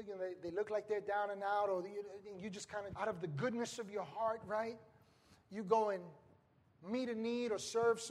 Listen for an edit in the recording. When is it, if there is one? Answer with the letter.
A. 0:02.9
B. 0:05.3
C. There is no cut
A